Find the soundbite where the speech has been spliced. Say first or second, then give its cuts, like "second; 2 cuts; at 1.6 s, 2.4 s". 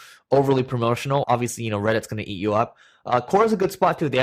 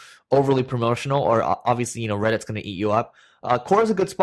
first; 1 cut; at 1.2 s